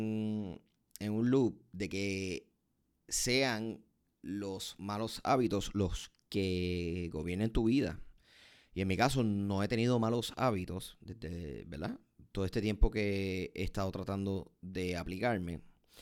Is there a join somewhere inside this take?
no; 0 cuts

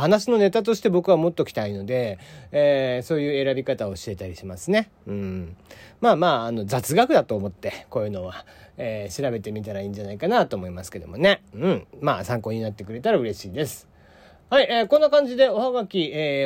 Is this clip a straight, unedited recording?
yes; 0 cuts

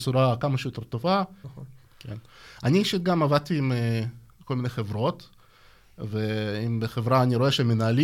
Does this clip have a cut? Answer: yes; 1 cut; at 1.4 s

